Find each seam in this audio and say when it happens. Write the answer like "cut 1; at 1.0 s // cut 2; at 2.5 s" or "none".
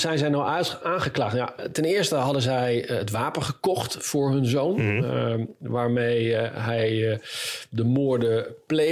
none